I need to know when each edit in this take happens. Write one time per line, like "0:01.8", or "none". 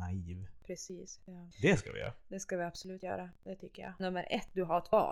0:01.2
0:04.0